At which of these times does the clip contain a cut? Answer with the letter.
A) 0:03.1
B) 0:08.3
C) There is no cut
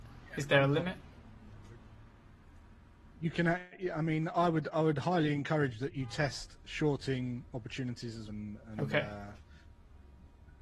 B